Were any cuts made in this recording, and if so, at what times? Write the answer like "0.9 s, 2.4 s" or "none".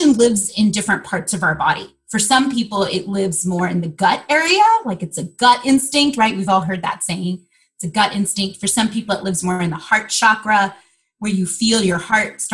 none